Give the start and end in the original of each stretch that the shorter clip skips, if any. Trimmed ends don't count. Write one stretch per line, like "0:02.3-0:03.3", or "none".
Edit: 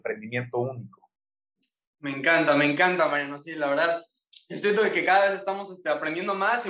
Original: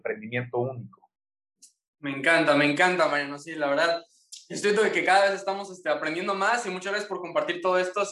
none